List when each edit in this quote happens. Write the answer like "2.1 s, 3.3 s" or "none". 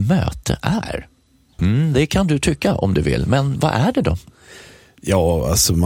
1.6 s